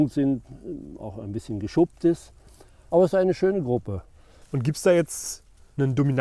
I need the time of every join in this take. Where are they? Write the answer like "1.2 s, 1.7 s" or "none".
2.9 s, 4.4 s